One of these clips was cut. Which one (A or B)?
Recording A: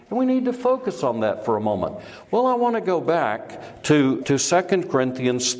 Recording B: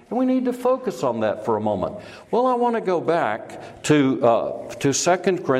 A